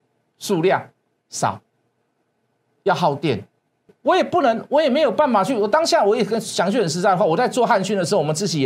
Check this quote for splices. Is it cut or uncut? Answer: cut